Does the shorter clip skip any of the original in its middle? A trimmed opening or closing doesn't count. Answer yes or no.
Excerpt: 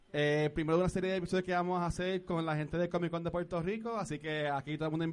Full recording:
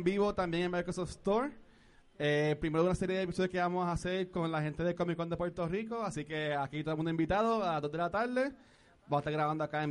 no